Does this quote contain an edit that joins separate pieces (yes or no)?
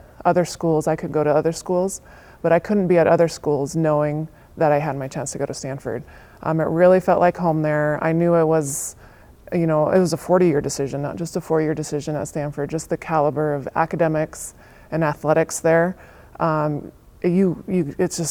no